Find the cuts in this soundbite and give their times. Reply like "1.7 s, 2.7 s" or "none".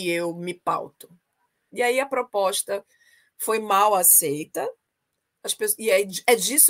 1.7 s